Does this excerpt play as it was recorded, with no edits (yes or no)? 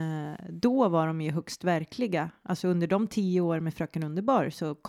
yes